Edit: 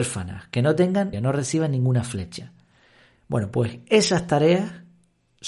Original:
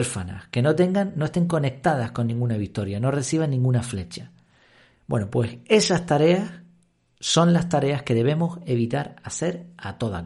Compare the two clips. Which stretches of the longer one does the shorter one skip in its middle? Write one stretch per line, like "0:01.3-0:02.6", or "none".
0:01.1-0:02.9